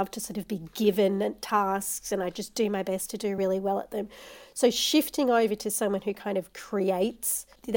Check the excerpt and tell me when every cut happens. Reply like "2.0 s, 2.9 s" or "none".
none